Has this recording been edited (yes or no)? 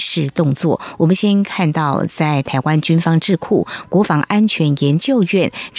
no